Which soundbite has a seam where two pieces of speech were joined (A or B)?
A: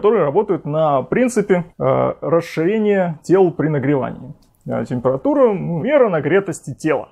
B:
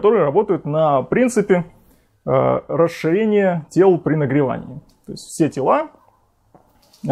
A